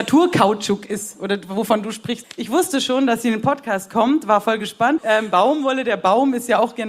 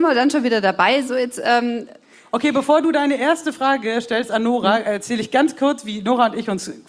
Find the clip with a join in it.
first; 2 cuts; at 2.2 s, 5.0 s

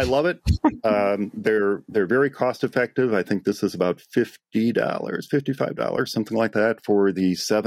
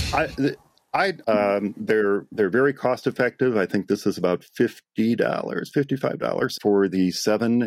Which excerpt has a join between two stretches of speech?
second; 2 cuts; at 1.2 s, 6.6 s

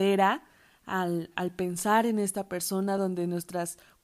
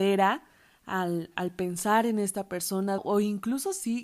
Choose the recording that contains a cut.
second; 1 cut; at 3.0 s

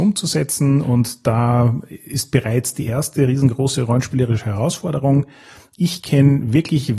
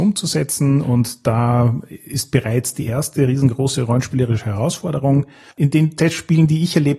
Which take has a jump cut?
second; 1 cut; at 5.5 s

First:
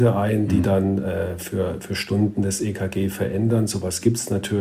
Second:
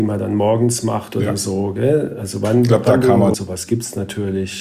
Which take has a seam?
second; 1 cut; at 3.3 s

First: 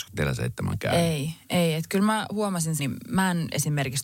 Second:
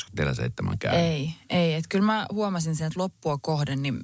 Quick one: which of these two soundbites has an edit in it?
first; 1 cut; at 2.8 s

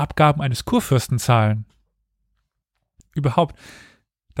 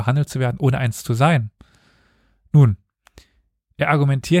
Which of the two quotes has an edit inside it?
first; 1 cut; at 3.0 s

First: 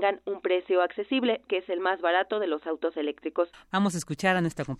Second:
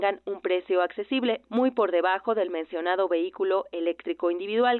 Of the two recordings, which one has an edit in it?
first; 2 cuts; at 1.5 s, 3.5 s

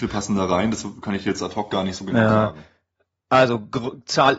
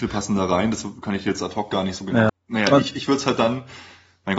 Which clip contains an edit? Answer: second; 1 cut; at 2.3 s

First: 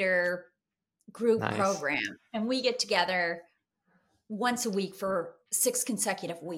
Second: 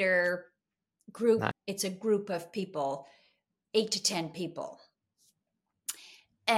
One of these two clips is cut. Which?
second; 1 cut; at 1.5 s

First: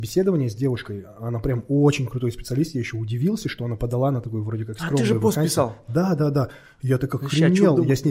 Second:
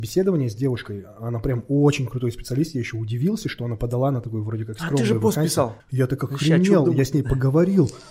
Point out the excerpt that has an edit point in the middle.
second; 1 cut; at 5.8 s

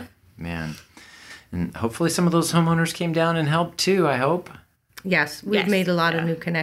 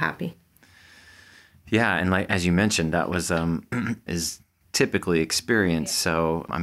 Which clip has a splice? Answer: second; 1 cut; at 4.1 s

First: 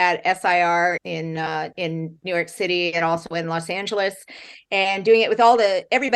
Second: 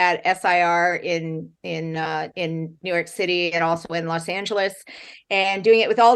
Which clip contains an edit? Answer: first; 1 cut; at 1.0 s

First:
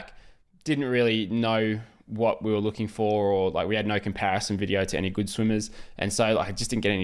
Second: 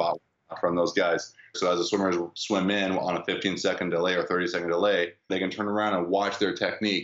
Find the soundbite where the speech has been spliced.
second; 2 cuts; at 1.5 s, 5.3 s

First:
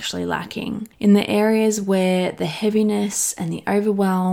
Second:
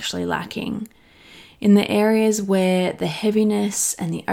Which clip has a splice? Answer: first; 1 cut; at 0.9 s

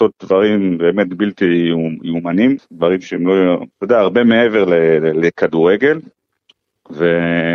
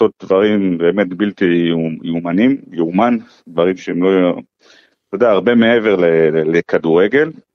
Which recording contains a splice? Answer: first; 2 cuts; at 2.6 s, 3.7 s

